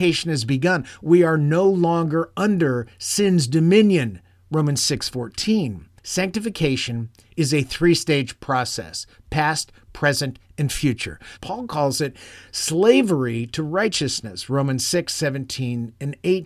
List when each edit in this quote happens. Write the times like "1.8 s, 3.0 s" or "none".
6.0 s, 11.4 s